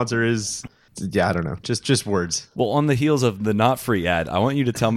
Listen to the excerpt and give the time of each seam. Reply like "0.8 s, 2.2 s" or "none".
none